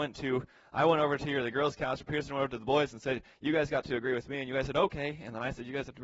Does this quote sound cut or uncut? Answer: uncut